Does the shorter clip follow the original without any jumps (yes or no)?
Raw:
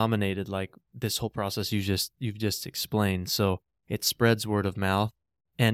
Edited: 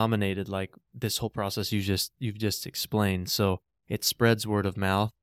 yes